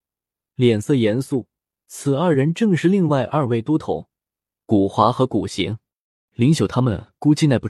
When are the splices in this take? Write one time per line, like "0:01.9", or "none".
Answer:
0:06.3